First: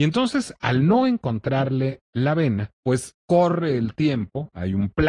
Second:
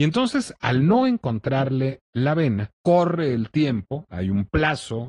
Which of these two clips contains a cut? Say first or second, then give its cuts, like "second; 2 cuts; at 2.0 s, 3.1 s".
second; 1 cut; at 2.7 s